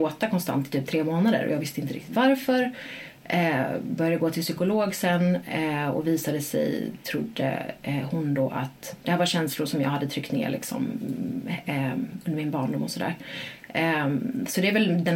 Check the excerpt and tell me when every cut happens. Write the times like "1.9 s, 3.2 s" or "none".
none